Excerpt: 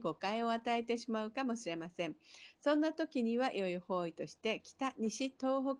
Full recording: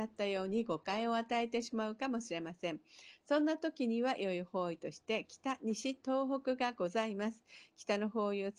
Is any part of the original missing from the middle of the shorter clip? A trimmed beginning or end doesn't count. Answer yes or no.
no